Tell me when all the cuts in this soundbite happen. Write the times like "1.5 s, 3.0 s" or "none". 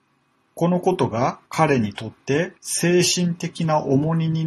1.5 s, 2.6 s